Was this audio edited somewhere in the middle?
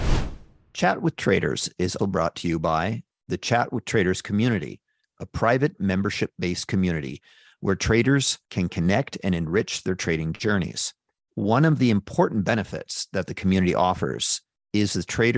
yes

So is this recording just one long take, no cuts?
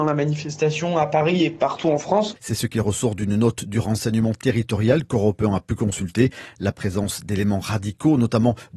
no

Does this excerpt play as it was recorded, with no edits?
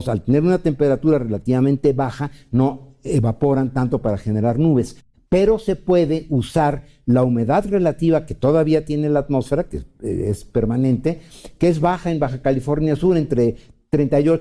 yes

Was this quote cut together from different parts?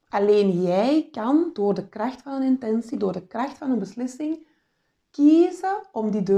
no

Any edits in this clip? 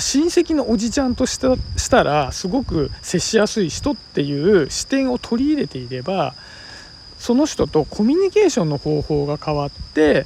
no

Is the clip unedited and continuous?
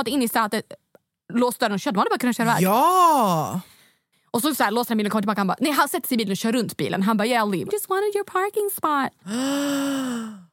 no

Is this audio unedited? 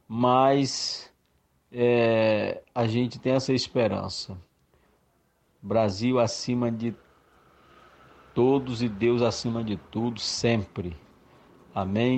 yes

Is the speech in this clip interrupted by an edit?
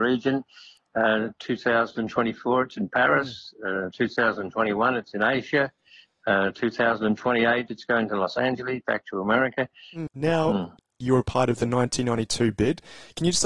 yes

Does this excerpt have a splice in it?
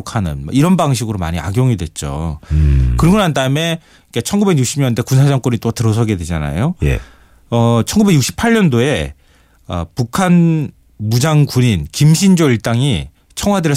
no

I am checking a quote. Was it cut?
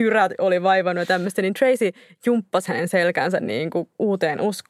no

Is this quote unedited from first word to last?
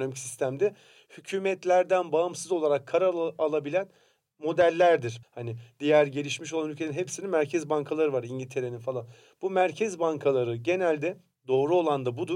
no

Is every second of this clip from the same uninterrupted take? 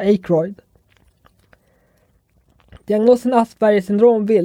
yes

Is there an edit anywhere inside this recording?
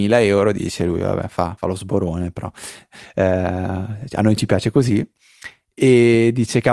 no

